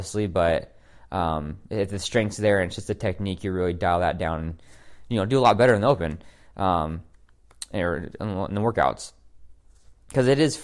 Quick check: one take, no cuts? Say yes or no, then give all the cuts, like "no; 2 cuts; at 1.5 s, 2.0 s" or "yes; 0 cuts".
yes; 0 cuts